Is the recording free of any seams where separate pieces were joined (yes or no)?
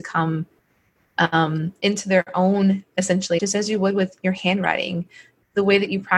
no